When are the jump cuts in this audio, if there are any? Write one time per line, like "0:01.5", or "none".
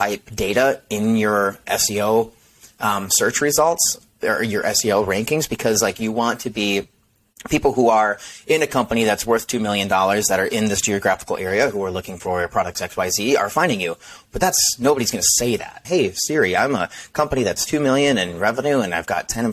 0:15.8